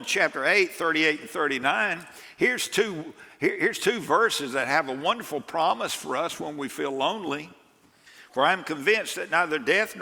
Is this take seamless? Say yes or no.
yes